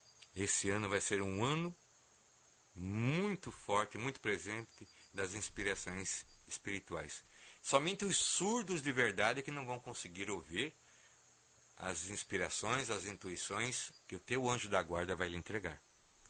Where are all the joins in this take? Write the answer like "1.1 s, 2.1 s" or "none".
7.6 s